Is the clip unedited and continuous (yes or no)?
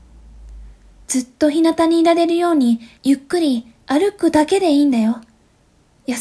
no